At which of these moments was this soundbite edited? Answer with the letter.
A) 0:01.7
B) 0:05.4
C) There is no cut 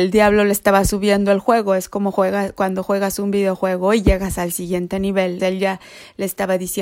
B